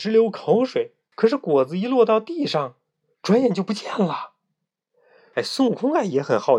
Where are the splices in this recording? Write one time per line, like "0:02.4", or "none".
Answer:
0:01.1
0:05.3